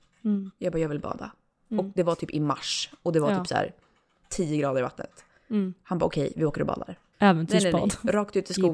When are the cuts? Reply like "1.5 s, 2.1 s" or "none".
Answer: 7.1 s